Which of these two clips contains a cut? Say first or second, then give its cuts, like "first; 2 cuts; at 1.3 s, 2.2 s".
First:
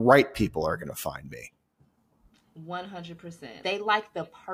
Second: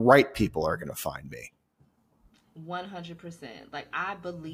first; 1 cut; at 3.6 s